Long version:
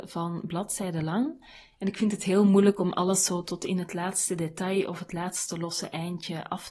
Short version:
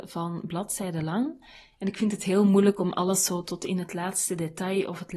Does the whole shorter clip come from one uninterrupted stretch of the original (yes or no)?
yes